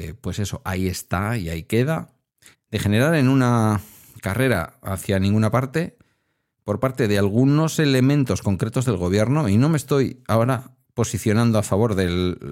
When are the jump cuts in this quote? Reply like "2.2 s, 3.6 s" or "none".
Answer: 2.5 s